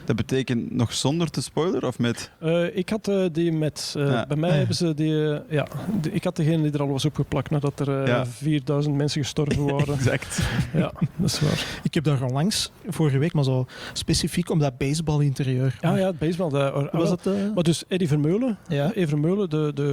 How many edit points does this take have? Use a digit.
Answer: 1